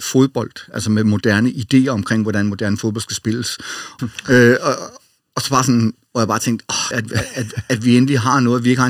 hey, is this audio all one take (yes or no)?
no